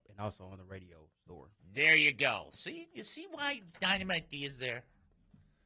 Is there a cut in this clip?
no; 0 cuts

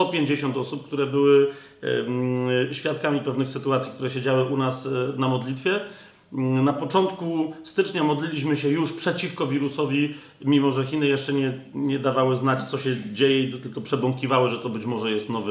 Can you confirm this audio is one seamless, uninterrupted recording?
yes; 0 cuts

